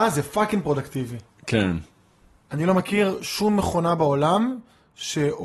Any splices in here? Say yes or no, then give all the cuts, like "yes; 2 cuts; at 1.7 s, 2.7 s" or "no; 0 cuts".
no; 0 cuts